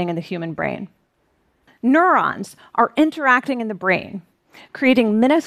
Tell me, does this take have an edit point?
yes; 1 cut; at 1.7 s

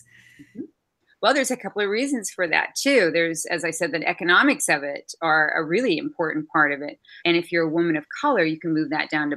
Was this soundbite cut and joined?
yes; 1 cut; at 7.2 s

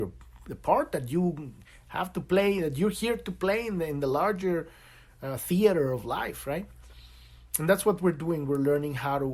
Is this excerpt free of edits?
yes; 0 cuts

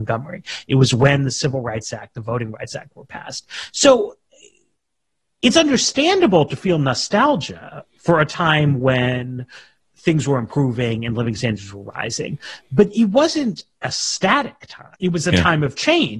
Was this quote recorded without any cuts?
no; 1 cut; at 14.9 s

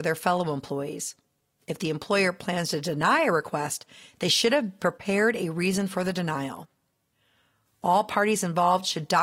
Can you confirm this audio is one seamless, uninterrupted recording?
yes; 0 cuts

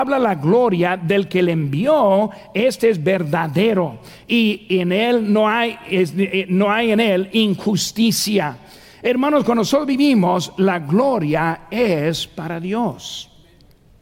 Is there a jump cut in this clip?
no; 0 cuts

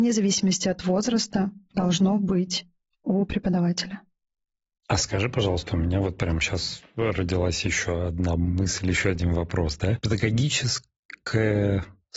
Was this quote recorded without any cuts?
yes; 0 cuts

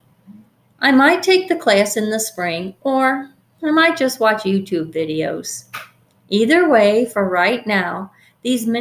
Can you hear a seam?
no; 0 cuts

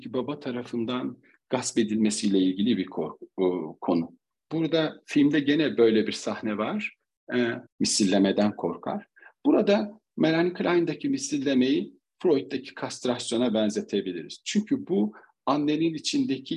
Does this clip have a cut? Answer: yes; 2 cuts; at 4.3 s, 7.7 s

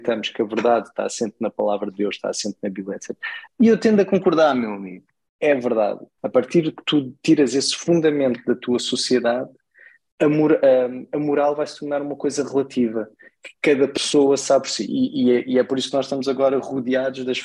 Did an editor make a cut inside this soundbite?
yes; 2 cuts; at 3.5 s, 6.2 s

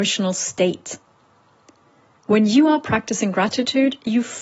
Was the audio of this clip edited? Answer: no; 0 cuts

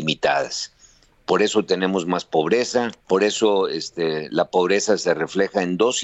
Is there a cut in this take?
yes; 1 cut; at 3.0 s

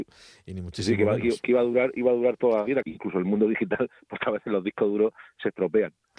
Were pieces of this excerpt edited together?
yes; 1 cut; at 2.8 s

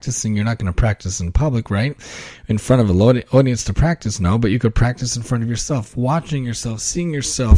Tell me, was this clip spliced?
no; 0 cuts

